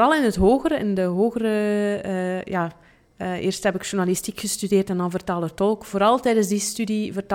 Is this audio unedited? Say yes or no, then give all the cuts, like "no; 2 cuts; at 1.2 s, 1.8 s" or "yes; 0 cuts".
yes; 0 cuts